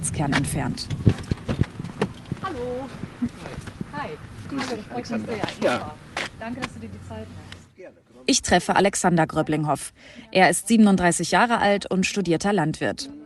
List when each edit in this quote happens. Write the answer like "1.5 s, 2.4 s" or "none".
none